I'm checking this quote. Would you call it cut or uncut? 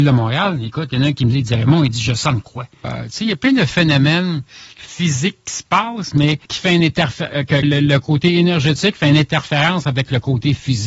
cut